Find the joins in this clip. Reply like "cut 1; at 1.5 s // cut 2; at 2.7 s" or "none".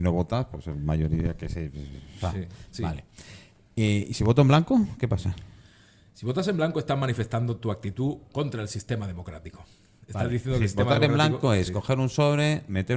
none

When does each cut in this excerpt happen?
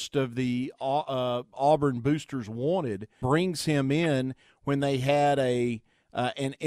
cut 1; at 3.2 s

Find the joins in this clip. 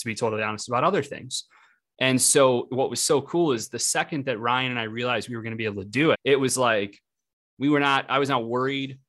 cut 1; at 6.1 s

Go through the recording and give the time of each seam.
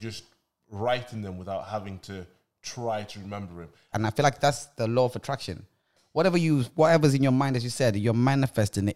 cut 1; at 3.9 s

